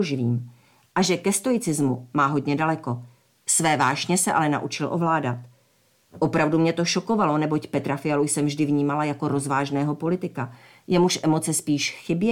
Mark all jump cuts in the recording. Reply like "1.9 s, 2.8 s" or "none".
none